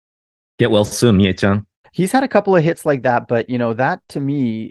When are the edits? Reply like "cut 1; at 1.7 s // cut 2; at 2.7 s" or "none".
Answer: cut 1; at 1.8 s